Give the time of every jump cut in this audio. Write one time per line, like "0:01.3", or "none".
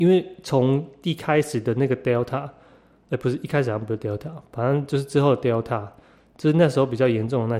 none

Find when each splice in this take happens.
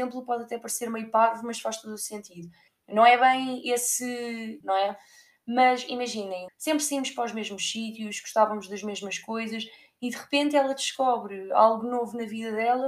0:02.7
0:04.6
0:06.5

